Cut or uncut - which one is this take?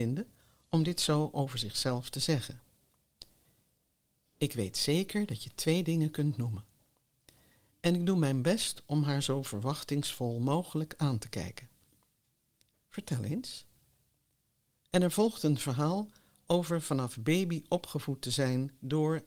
cut